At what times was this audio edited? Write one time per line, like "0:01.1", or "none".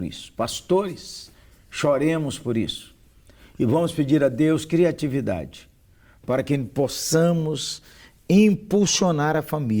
none